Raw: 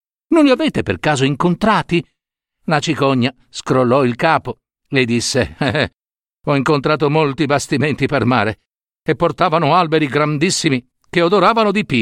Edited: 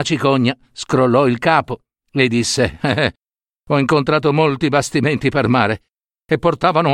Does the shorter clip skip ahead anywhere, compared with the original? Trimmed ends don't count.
no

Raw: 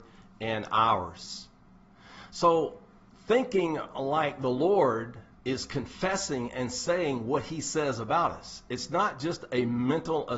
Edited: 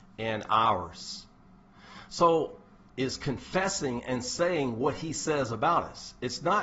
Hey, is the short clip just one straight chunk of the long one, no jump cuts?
no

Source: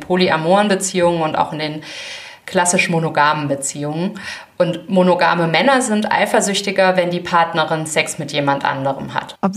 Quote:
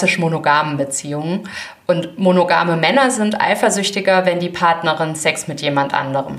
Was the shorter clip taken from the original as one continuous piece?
yes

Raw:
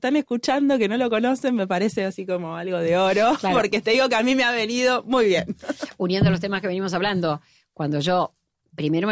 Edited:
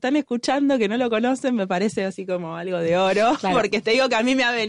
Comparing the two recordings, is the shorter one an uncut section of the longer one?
yes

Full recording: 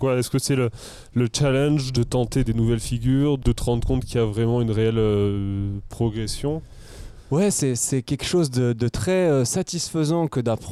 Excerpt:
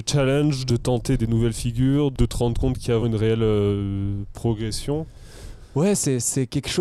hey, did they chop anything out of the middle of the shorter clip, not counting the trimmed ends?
yes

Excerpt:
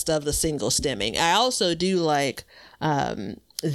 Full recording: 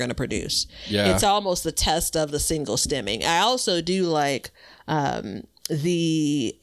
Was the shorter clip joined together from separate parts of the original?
no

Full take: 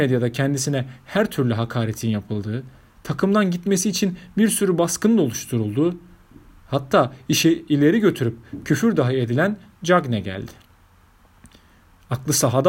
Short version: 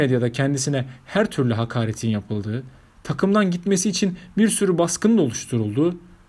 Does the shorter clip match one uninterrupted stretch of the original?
yes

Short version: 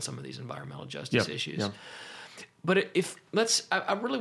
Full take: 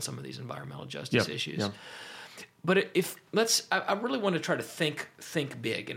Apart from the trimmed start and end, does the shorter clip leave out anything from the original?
no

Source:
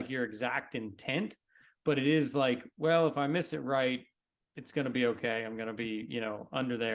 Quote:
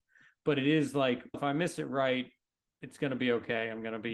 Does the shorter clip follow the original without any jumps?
no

